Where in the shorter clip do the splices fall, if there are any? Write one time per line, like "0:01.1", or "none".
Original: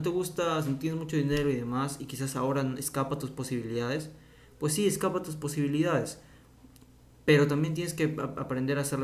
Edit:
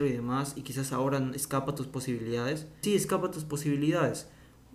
0:02.8